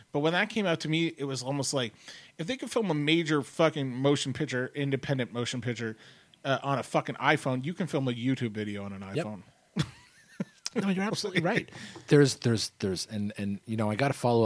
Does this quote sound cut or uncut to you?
uncut